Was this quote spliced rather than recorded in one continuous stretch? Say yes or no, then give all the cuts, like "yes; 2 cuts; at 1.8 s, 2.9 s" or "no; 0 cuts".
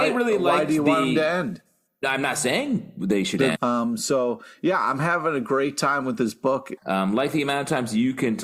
yes; 2 cuts; at 3.6 s, 6.8 s